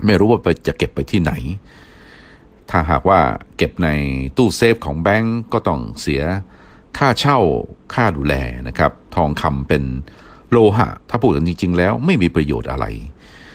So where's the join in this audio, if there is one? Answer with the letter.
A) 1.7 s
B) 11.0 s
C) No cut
B